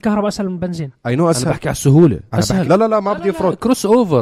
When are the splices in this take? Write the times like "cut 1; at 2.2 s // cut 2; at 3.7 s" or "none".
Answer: cut 1; at 2.6 s